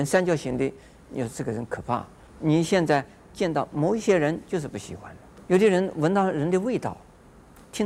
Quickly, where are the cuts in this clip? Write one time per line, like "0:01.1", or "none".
0:02.3
0:05.4